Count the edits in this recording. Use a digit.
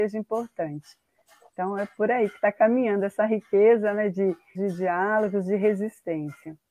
1